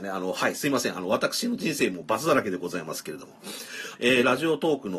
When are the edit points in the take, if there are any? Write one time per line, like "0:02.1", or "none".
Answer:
0:04.0